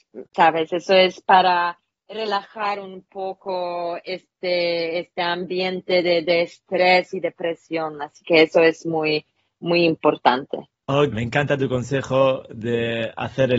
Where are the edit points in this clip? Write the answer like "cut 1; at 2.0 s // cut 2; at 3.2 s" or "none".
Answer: cut 1; at 11.1 s